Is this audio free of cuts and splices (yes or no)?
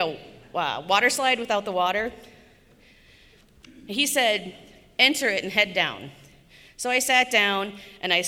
yes